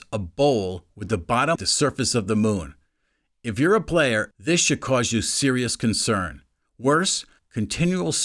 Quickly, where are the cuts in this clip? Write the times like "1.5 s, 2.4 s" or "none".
1.6 s, 4.3 s, 6.6 s